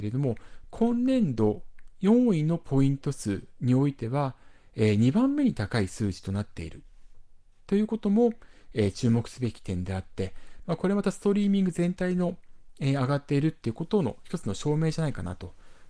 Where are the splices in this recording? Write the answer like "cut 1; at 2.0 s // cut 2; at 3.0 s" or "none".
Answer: none